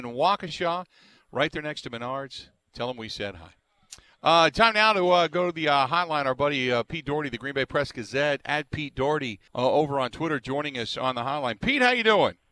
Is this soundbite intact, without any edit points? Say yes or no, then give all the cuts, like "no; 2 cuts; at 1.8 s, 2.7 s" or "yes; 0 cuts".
no; 1 cut; at 9.5 s